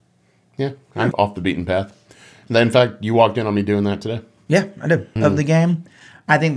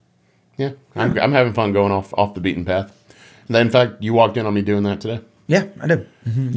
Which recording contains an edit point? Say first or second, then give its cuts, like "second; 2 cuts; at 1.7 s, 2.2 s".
first; 2 cuts; at 1.1 s, 5.2 s